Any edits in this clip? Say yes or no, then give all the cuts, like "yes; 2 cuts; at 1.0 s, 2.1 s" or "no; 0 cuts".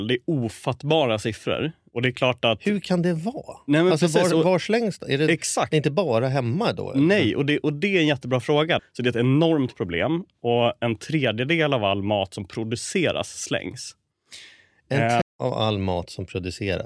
yes; 2 cuts; at 8.8 s, 15.2 s